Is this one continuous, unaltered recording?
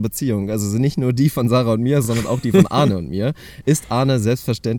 yes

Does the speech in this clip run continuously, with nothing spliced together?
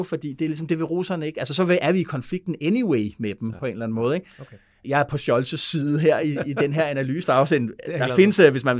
no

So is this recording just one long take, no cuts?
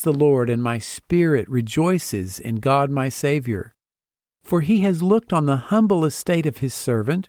yes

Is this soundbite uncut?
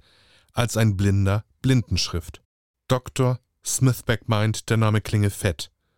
no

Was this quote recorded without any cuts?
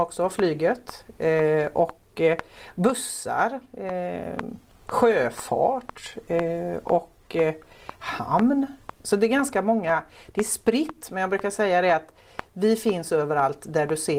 yes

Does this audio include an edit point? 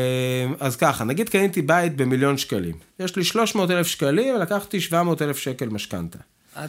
no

